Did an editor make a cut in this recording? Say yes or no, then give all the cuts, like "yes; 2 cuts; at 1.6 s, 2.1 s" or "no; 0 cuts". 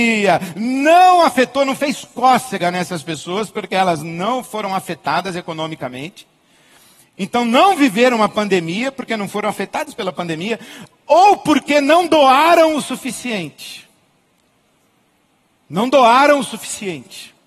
no; 0 cuts